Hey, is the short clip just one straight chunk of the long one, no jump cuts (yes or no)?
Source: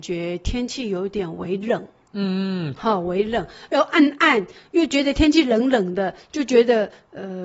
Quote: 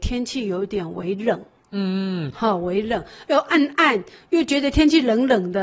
yes